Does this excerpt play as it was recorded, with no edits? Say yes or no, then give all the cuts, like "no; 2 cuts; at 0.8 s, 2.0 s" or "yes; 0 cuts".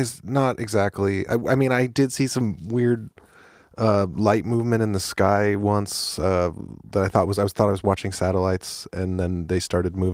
yes; 0 cuts